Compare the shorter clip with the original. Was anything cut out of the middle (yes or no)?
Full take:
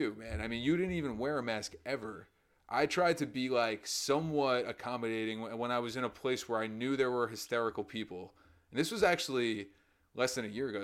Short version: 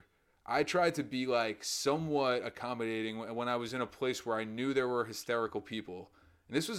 no